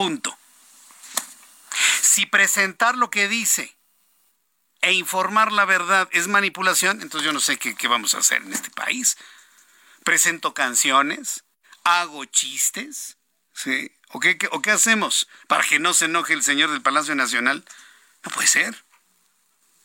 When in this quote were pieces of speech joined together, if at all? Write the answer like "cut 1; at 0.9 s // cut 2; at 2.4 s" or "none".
cut 1; at 15.4 s